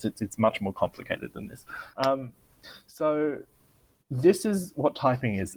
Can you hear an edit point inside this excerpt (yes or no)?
yes